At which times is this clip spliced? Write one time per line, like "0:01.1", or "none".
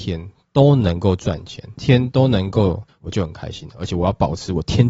0:01.8
0:02.9